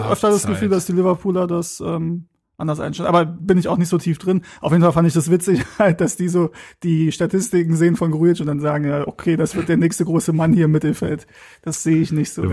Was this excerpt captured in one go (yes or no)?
yes